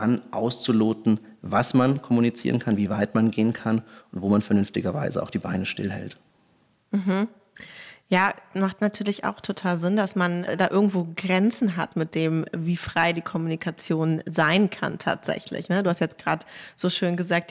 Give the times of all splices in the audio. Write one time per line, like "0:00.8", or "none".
none